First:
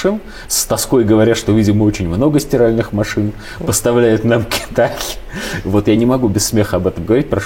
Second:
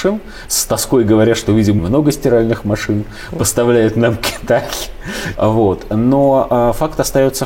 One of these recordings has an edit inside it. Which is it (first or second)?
second